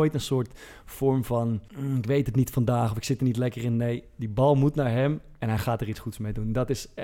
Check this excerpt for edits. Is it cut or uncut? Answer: cut